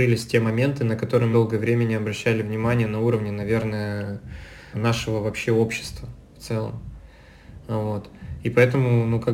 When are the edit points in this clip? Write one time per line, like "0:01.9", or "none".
0:01.3
0:04.7